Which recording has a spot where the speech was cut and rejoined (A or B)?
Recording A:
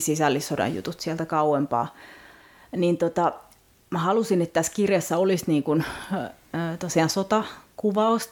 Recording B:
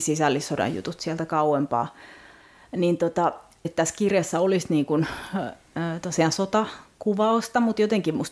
B